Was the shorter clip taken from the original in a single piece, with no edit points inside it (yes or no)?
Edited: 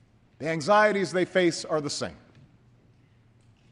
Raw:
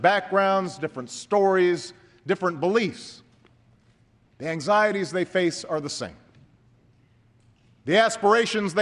yes